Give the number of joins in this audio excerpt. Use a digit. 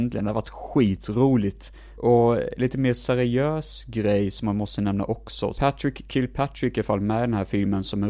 2